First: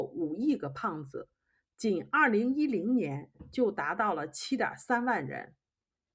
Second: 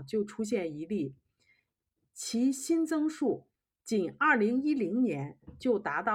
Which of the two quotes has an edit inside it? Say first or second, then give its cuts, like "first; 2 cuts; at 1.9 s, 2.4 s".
first; 1 cut; at 1.6 s